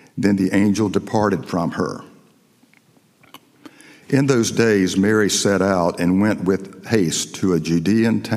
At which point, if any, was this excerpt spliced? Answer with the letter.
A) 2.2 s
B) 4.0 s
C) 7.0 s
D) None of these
D